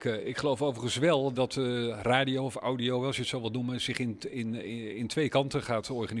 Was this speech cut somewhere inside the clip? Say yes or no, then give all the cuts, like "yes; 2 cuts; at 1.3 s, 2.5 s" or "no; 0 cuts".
yes; 1 cut; at 1.3 s